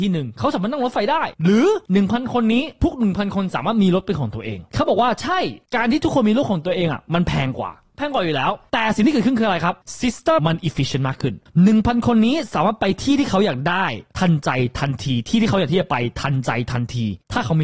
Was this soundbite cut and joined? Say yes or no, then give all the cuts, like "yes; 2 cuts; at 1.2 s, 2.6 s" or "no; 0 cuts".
yes; 1 cut; at 10.4 s